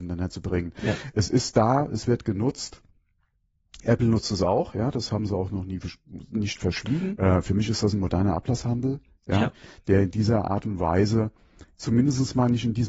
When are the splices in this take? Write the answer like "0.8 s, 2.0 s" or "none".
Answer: 7.2 s